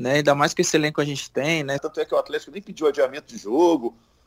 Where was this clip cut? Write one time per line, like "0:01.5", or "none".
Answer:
0:01.8